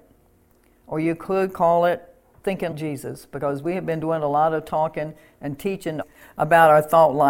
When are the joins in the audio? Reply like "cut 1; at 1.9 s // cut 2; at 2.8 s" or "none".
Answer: cut 1; at 2.7 s